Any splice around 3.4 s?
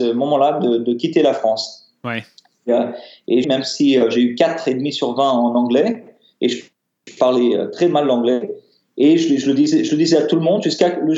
yes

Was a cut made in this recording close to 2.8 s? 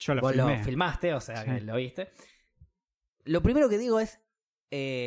no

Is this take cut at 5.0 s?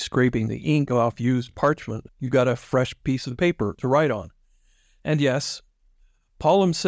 no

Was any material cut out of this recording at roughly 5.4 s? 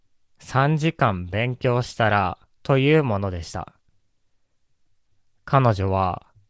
no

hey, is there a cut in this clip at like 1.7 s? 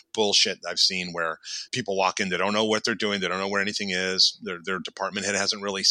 yes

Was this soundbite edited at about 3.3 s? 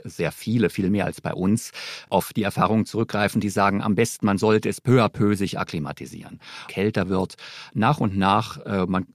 no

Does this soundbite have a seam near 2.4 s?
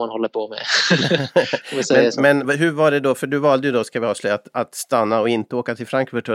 yes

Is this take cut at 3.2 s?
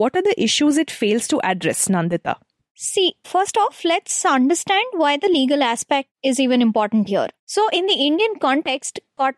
yes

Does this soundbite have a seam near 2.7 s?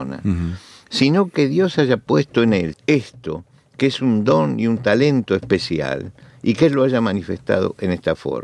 yes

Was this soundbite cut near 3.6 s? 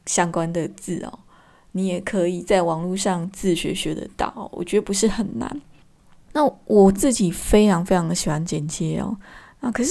no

